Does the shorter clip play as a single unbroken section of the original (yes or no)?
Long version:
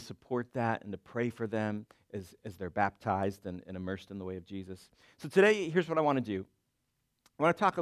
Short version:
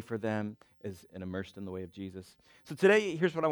no